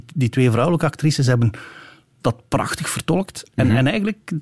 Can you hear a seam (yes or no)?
no